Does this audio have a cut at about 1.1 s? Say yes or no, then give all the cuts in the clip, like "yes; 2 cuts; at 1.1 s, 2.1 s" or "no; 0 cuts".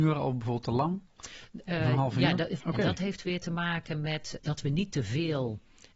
no; 2 cuts; at 2.6 s, 4.4 s